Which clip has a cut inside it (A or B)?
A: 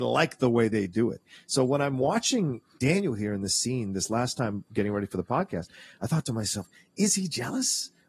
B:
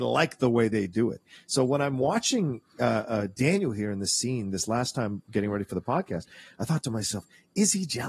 A